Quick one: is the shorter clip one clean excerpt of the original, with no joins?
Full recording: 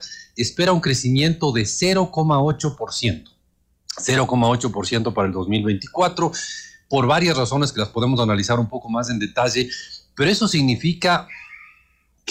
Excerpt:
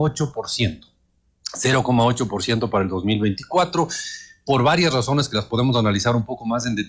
yes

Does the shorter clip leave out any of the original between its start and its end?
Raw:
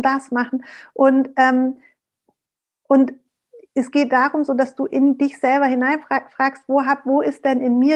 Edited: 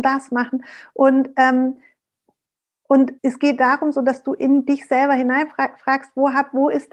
yes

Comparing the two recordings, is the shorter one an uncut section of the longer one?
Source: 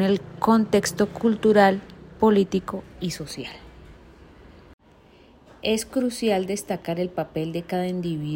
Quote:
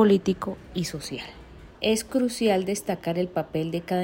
no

